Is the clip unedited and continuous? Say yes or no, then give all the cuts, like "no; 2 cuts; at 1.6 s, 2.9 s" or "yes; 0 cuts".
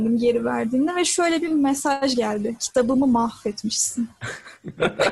yes; 0 cuts